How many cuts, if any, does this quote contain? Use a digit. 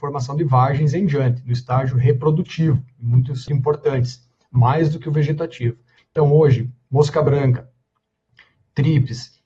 2